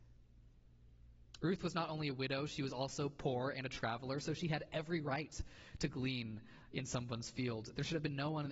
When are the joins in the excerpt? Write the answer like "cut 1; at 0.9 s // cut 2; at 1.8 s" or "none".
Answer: none